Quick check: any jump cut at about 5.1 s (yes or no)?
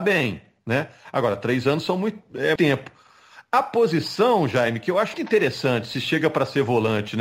yes